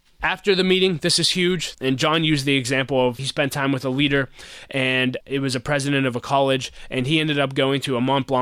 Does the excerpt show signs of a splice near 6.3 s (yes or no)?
no